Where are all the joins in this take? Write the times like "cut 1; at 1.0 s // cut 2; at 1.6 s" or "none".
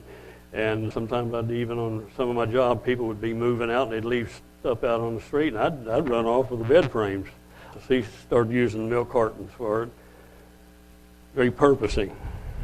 cut 1; at 0.9 s // cut 2; at 7.7 s